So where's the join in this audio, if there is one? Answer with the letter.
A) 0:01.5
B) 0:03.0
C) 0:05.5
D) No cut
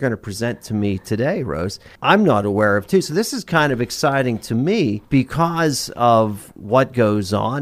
D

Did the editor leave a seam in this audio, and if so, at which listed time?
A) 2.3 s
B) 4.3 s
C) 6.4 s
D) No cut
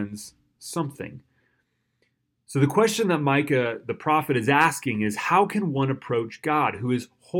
A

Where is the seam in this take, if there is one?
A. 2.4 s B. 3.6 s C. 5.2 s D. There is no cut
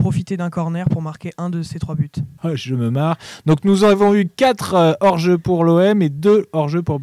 A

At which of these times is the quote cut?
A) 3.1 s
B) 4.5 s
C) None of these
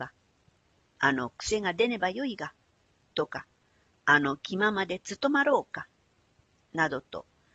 C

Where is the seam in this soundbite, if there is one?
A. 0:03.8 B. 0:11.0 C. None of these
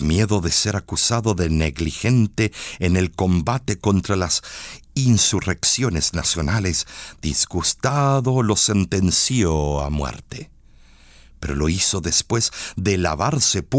C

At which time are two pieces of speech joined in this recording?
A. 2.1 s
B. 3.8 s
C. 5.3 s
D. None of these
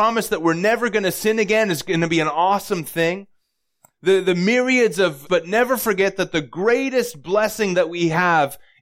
C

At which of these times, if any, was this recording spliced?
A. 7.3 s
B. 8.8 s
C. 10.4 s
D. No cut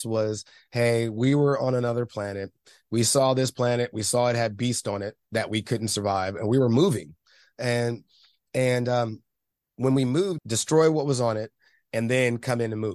C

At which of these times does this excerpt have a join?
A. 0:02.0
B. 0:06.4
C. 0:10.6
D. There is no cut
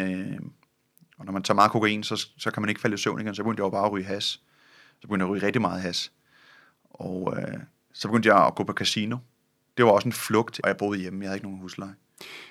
C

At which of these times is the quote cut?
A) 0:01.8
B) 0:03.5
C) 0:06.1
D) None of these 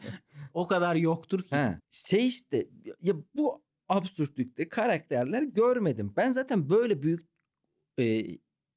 A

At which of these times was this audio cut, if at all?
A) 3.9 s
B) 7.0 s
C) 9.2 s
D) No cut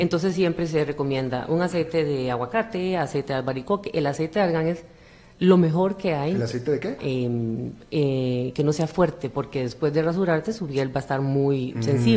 B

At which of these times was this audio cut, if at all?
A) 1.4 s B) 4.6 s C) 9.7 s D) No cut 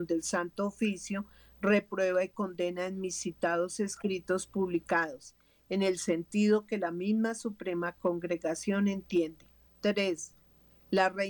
C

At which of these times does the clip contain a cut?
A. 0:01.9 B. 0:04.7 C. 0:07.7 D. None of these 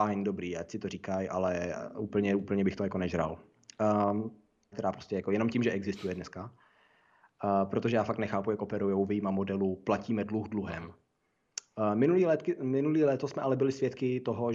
B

